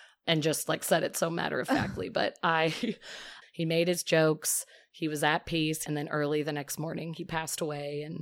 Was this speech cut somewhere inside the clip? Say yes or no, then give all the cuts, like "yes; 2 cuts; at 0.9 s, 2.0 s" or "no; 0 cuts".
yes; 2 cuts; at 3.4 s, 5.9 s